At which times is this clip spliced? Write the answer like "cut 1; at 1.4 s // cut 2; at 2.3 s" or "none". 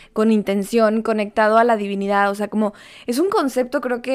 none